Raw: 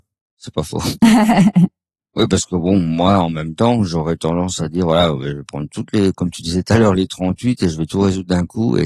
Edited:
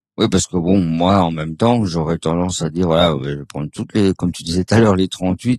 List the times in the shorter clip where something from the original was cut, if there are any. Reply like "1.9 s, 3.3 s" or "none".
none